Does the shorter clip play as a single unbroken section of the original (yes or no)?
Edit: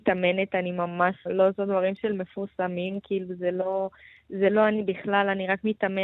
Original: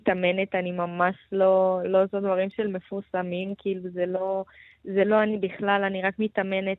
no